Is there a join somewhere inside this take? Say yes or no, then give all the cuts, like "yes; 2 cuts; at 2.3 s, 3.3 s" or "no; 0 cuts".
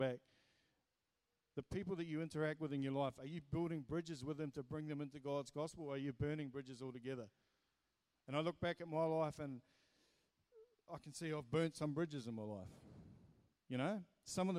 yes; 1 cut; at 10.9 s